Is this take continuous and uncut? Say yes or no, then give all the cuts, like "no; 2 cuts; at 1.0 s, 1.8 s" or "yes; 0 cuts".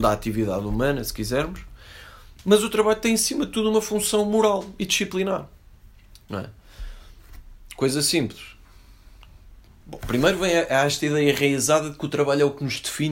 yes; 0 cuts